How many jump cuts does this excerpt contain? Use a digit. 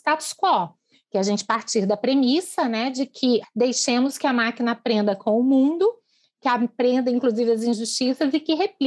1